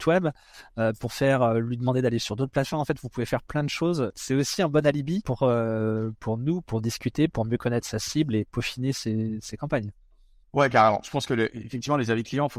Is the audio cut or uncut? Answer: uncut